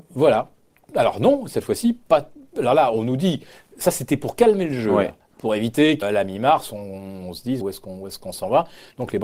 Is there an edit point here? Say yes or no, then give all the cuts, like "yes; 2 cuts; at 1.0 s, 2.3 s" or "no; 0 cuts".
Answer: yes; 2 cuts; at 6.0 s, 7.6 s